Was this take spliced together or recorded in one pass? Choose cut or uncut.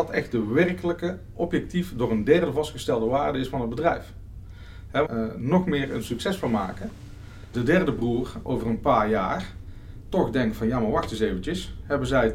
cut